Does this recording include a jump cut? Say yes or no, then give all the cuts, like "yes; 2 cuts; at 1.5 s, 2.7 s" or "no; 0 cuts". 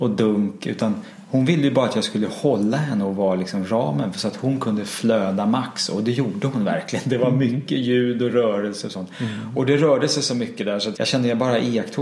yes; 1 cut; at 10.9 s